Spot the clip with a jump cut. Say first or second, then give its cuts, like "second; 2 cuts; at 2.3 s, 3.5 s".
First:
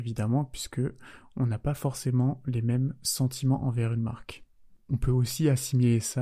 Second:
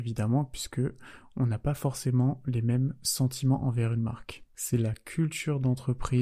second; 1 cut; at 4.5 s